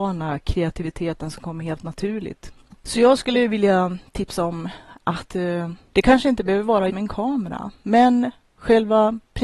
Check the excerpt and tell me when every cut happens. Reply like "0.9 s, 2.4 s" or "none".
6.9 s

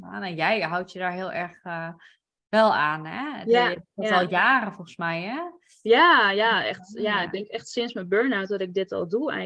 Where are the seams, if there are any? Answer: none

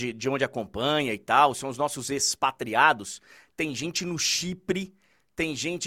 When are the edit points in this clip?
none

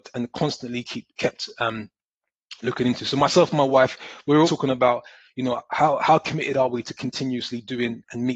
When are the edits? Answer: 4.4 s

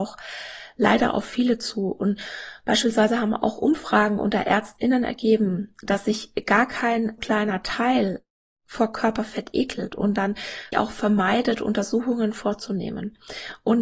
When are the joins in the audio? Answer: 7.2 s, 10.7 s

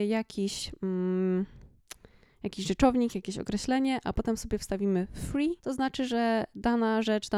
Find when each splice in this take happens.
5.6 s

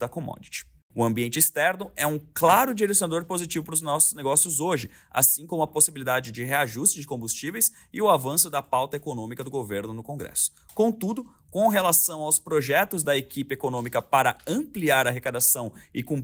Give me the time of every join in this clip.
none

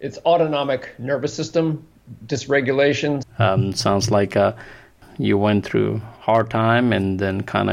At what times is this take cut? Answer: 3.2 s

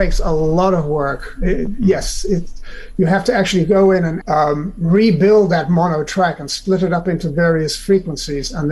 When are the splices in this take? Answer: 4.2 s

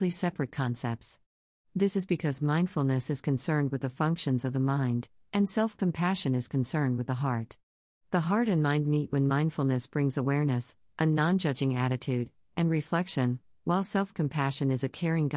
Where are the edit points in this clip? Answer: none

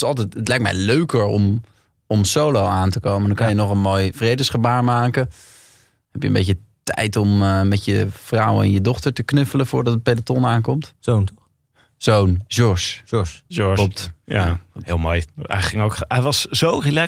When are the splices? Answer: none

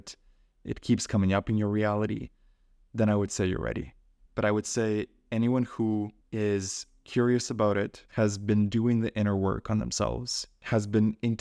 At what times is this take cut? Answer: 4.3 s, 8.1 s

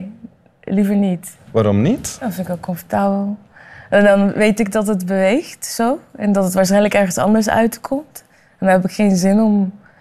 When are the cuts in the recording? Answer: none

